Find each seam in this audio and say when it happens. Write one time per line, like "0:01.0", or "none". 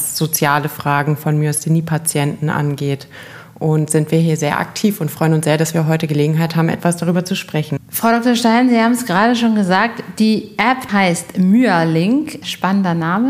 0:10.9

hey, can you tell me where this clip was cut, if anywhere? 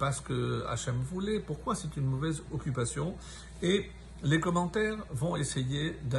0:05.1

